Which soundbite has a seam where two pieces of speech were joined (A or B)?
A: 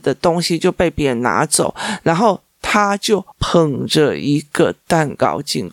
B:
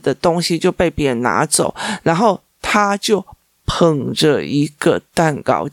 A